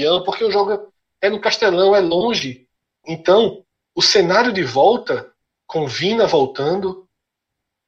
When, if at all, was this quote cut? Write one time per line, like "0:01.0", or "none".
0:03.0